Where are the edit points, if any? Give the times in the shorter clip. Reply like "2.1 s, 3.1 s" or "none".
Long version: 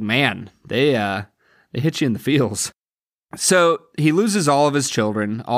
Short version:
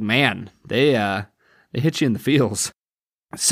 none